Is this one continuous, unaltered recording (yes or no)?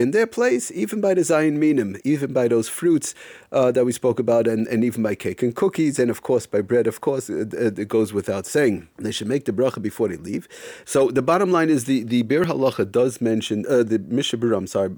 no